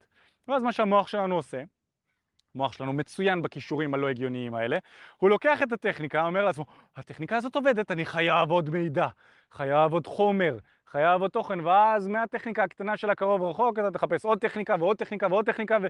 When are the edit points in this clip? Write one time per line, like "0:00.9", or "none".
none